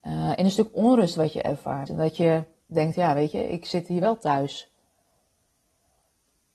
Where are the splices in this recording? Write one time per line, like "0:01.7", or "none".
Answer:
0:01.9

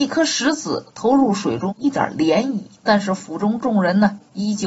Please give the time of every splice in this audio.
0:01.7
0:02.8

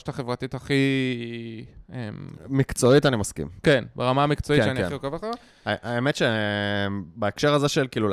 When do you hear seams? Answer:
none

